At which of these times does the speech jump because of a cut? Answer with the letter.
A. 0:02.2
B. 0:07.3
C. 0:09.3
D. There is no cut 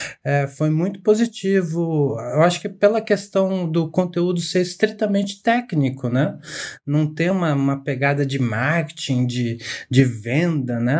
D